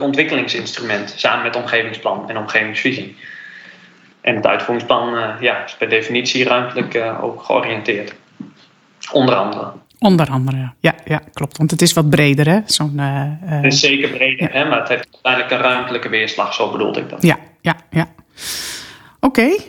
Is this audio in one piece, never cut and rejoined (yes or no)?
yes